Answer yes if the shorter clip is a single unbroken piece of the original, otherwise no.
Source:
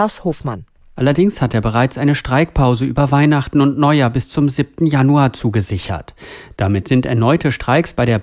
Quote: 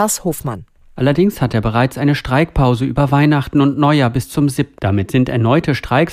no